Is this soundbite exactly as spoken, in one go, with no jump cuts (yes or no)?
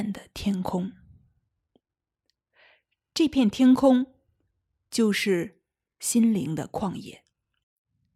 yes